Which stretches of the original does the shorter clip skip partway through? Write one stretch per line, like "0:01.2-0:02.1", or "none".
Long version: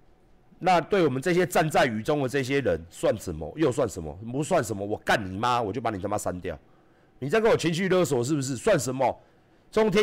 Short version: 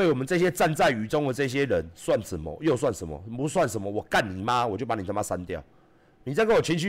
none